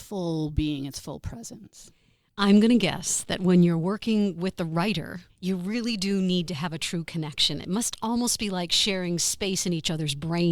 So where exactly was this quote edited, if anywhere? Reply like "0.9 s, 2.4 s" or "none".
5.3 s